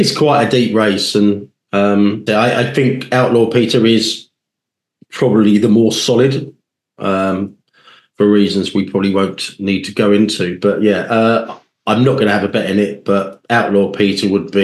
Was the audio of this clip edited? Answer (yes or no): yes